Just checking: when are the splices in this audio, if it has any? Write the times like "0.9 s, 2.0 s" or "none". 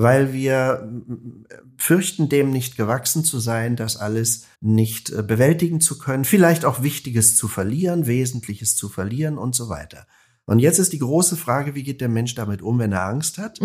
4.5 s